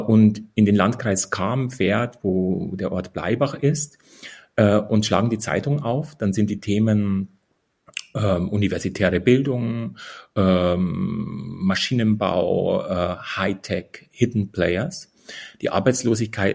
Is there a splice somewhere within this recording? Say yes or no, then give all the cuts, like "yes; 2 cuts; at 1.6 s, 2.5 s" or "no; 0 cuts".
no; 0 cuts